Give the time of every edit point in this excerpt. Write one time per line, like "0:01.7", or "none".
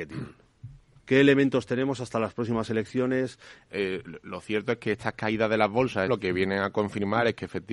0:01.0
0:03.7
0:06.1